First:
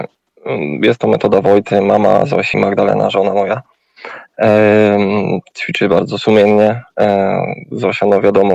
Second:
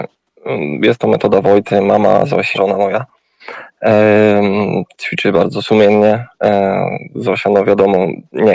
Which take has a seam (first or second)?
second